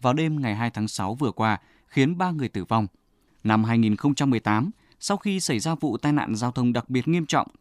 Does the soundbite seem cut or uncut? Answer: cut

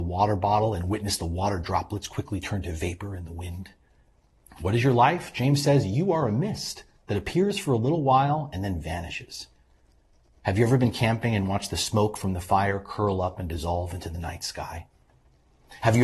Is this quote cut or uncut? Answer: cut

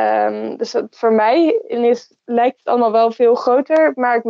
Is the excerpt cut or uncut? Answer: cut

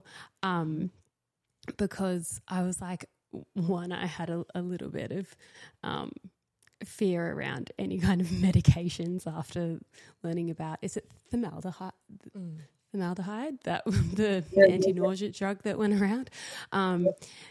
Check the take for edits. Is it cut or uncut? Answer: uncut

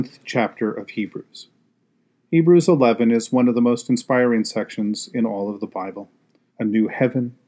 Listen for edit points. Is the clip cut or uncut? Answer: cut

